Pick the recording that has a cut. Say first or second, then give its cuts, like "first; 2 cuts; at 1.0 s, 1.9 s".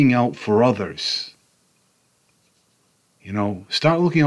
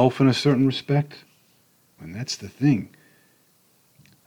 second; 1 cut; at 2.0 s